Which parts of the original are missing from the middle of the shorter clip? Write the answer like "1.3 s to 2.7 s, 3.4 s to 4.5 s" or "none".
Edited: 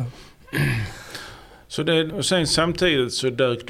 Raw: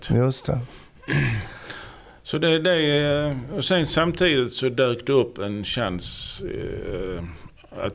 2.6 s to 3.5 s